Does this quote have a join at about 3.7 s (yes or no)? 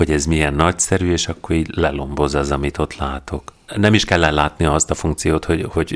yes